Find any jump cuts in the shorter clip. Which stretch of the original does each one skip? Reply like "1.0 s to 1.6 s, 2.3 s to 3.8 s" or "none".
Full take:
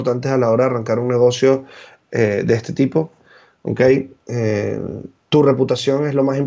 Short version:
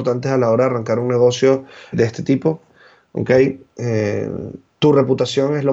1.9 s to 2.4 s